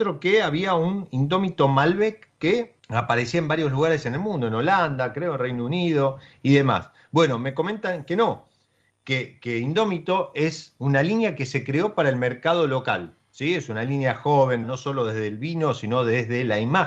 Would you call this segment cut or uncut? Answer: cut